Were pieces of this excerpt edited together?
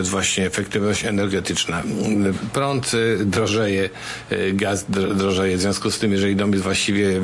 no; 0 cuts

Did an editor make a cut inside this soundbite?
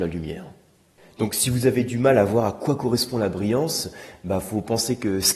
no; 0 cuts

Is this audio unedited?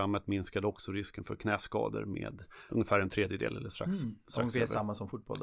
no; 1 cut; at 2.7 s

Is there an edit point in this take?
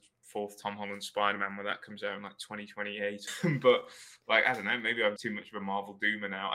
yes; 2 cuts; at 3.3 s, 5.2 s

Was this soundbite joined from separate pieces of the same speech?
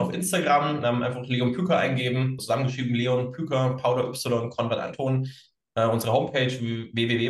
yes; 1 cut; at 2.4 s

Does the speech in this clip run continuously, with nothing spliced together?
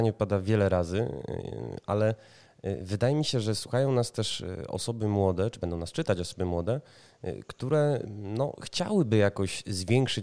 yes; 0 cuts

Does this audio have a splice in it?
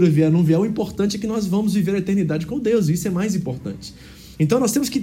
no; 0 cuts

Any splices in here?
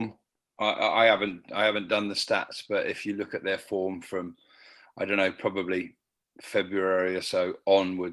no; 0 cuts

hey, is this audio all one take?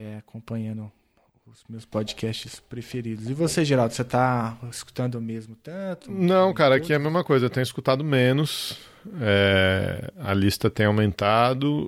yes; 0 cuts

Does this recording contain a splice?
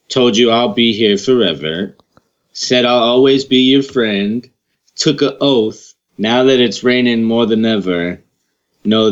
yes; 1 cut; at 6.1 s

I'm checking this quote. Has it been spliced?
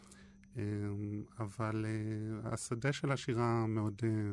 no; 0 cuts

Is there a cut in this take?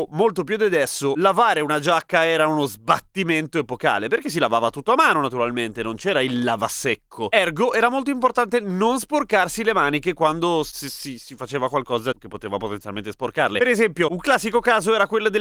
no; 0 cuts

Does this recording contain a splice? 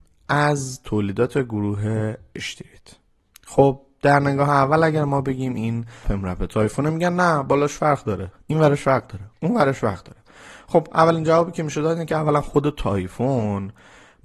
yes; 1 cut; at 6.0 s

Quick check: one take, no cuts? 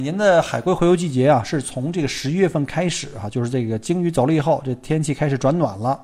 yes; 0 cuts

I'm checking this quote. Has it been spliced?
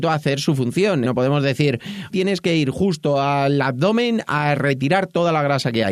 yes; 2 cuts; at 1.0 s, 2.1 s

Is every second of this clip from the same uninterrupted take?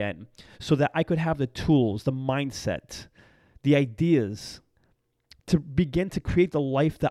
yes; 0 cuts

